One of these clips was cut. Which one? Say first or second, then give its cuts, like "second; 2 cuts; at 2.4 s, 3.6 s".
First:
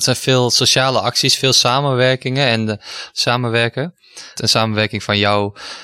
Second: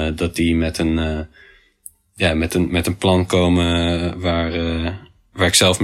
first; 2 cuts; at 3.1 s, 4.4 s